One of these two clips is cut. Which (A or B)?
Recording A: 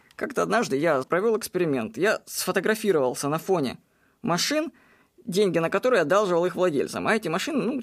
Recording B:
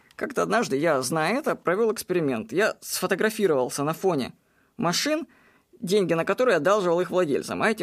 A